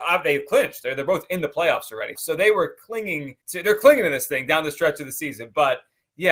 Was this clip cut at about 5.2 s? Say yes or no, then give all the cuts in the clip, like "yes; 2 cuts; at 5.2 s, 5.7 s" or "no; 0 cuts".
no; 2 cuts; at 2.1 s, 3.4 s